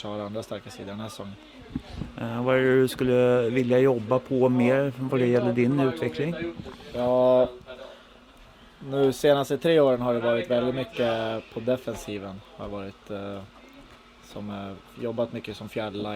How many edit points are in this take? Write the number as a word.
zero